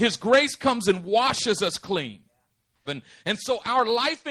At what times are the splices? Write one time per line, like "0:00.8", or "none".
0:02.9